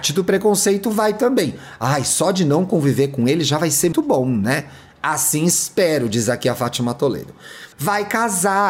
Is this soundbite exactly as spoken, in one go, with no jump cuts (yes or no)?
no